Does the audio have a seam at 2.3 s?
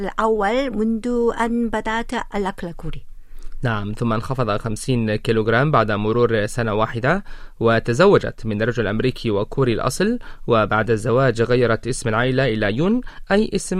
yes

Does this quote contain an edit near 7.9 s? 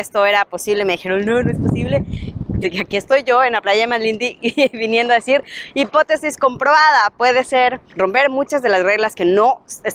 yes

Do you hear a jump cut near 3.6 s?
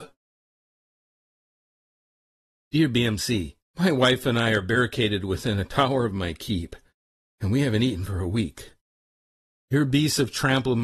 yes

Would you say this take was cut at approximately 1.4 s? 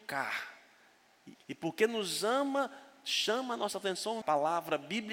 yes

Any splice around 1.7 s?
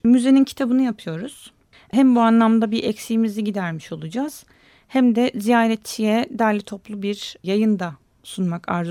yes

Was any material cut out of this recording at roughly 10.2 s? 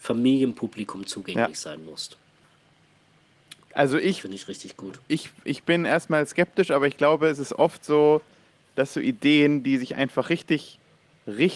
no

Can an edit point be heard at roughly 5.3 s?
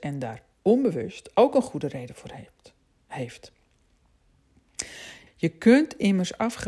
yes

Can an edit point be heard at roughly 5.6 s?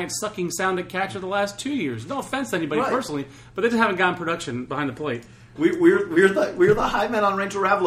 yes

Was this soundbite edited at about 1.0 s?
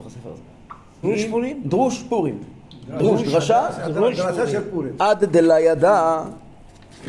yes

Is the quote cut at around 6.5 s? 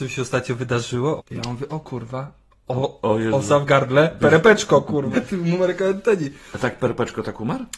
no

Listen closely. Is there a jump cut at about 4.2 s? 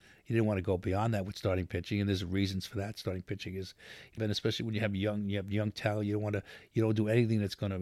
yes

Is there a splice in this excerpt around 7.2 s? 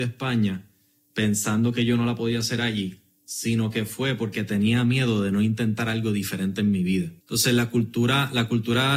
yes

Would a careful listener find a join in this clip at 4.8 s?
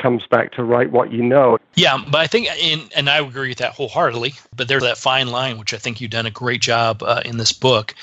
yes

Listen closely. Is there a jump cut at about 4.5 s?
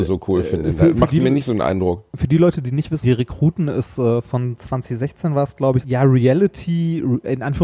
no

